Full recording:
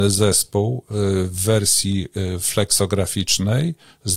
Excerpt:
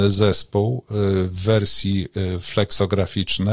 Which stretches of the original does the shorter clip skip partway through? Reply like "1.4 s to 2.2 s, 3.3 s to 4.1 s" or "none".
none